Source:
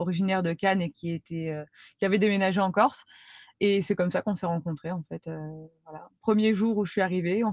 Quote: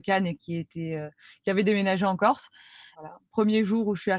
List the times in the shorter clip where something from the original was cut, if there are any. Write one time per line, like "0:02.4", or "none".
0:02.9